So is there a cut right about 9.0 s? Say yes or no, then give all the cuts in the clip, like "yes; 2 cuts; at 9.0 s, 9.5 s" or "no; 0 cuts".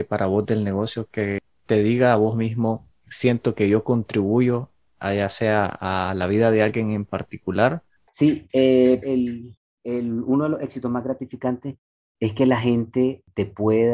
yes; 2 cuts; at 3.0 s, 9.0 s